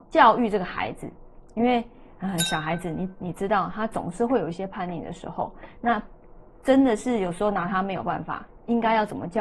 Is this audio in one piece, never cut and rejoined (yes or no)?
yes